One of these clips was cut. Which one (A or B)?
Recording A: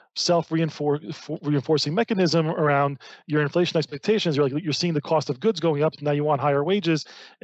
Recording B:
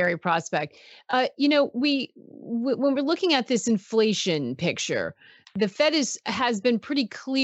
B